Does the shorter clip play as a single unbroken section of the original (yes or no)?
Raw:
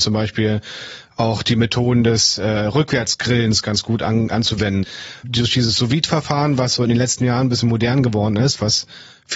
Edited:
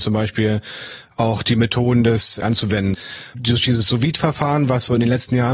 no